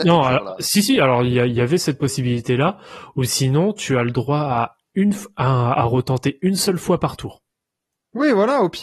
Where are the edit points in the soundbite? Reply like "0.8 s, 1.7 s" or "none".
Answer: none